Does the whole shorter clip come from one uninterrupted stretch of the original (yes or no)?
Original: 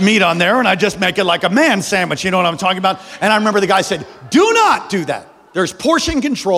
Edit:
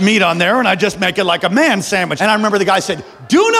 no